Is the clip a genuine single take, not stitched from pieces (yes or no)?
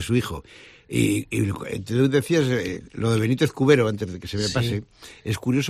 yes